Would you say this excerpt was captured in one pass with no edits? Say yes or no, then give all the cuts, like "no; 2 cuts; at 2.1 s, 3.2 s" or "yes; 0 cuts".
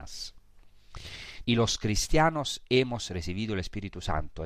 no; 1 cut; at 1.4 s